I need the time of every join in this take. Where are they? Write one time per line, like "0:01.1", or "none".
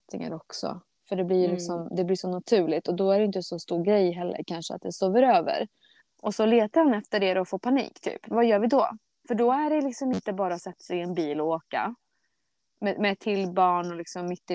0:01.0
0:06.0